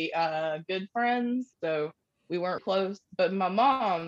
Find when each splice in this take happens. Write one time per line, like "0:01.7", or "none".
0:01.5
0:02.6